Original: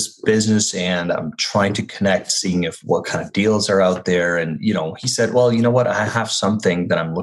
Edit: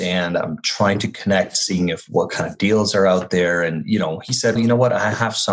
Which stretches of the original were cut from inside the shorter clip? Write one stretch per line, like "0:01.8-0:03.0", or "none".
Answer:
0:05.3-0:05.5